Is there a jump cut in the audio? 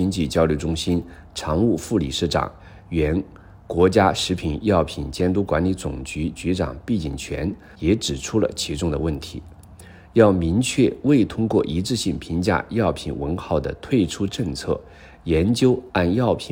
yes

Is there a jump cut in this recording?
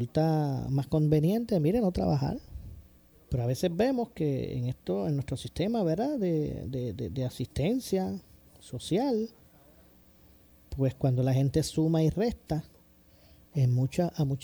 yes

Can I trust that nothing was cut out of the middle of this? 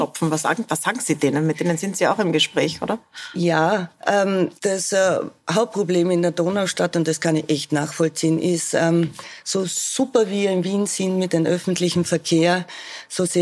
no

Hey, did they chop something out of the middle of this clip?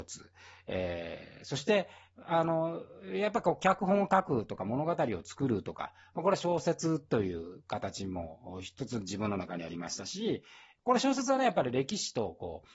no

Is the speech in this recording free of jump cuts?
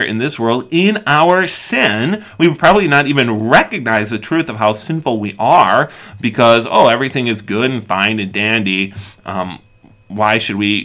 yes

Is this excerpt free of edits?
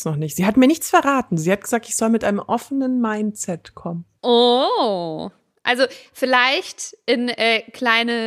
yes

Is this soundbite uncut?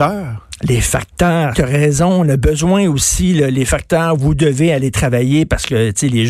no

